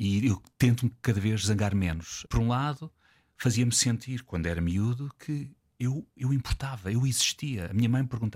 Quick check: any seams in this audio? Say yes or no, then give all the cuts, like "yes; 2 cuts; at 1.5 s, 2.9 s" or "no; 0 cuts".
yes; 2 cuts; at 2.3 s, 6.2 s